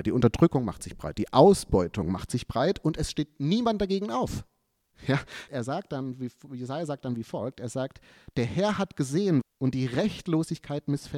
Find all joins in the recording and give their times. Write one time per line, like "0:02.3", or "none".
0:05.5
0:09.4

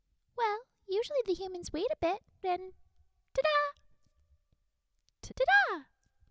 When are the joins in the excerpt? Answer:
0:02.4
0:05.3

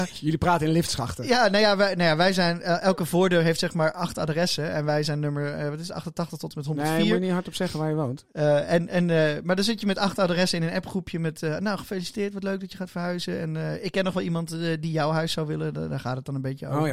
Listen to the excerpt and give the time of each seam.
0:08.3

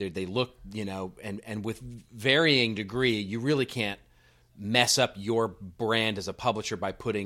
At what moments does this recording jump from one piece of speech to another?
none

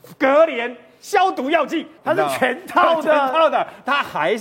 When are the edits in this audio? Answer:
0:02.0

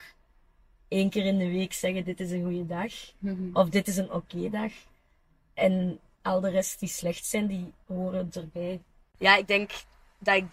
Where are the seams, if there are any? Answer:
none

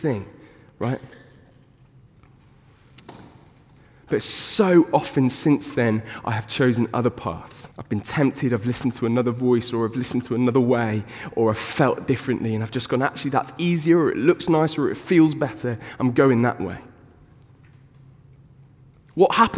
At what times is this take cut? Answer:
0:07.7

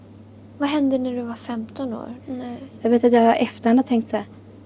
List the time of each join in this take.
0:02.2

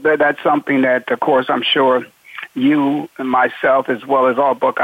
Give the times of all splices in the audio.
none

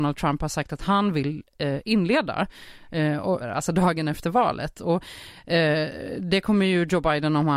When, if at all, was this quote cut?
0:03.4

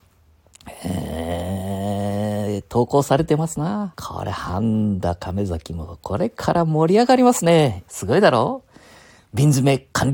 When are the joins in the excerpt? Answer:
0:03.9
0:07.9

